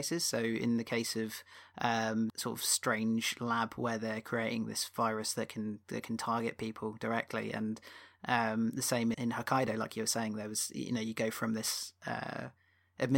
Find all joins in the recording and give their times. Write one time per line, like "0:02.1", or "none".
0:02.3
0:09.1